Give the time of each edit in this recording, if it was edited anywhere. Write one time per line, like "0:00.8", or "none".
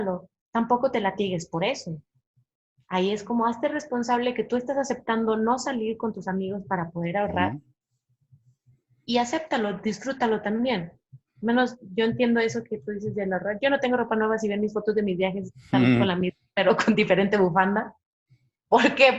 none